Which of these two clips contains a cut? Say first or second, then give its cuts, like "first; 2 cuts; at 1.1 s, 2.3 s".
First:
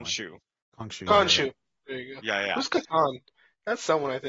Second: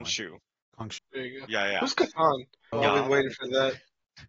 second; 2 cuts; at 1.0 s, 2.7 s